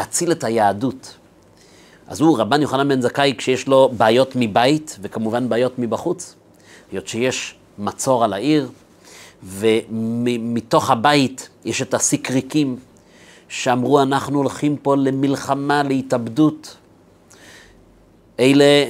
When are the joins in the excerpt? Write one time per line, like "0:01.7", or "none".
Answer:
0:01.9